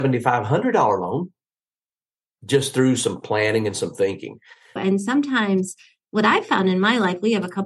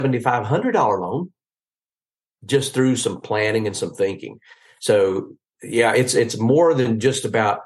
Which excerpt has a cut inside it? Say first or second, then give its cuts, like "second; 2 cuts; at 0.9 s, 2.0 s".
first; 1 cut; at 4.8 s